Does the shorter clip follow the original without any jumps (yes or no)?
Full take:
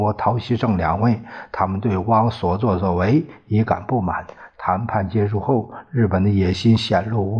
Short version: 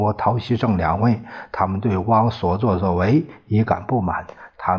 yes